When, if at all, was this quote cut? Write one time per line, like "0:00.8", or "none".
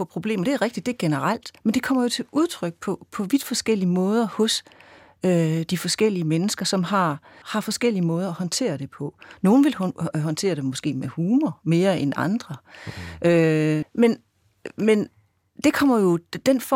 0:07.4
0:13.8